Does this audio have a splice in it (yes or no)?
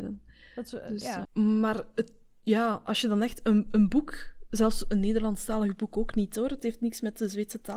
yes